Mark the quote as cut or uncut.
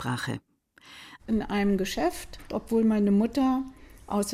cut